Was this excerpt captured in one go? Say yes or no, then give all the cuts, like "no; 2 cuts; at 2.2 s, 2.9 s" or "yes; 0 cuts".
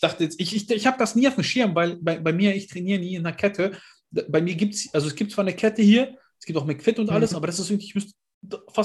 yes; 0 cuts